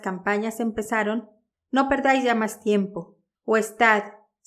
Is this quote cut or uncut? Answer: cut